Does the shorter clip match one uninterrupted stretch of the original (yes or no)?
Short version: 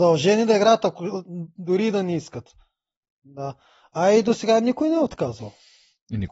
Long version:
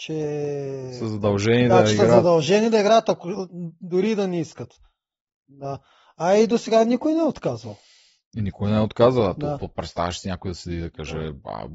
yes